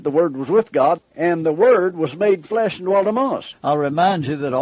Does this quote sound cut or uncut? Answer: cut